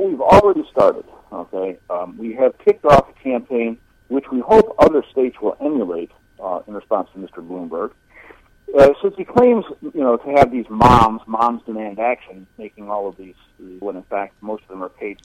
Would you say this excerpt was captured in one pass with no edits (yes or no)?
no